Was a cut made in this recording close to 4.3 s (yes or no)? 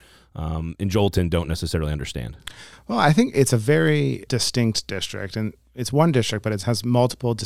yes